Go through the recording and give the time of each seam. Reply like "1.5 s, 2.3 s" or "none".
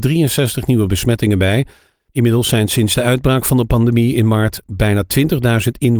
1.9 s

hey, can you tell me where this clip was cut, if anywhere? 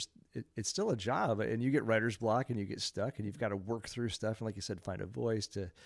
4.8 s

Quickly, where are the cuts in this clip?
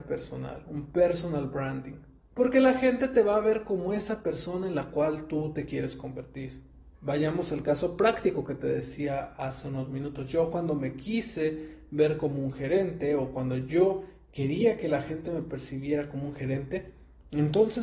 2.2 s, 6.9 s

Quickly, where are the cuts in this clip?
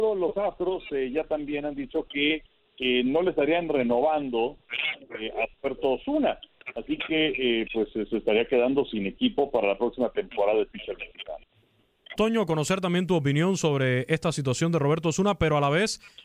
12.2 s

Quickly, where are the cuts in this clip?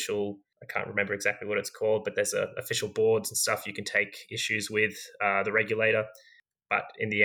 none

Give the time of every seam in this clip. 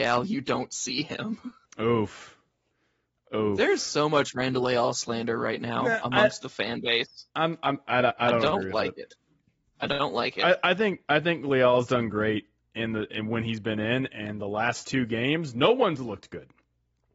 none

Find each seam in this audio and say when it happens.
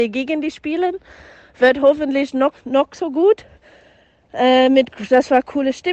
2.5 s

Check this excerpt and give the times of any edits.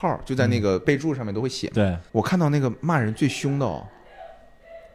2.1 s

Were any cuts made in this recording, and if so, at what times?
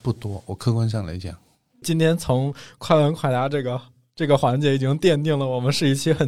none

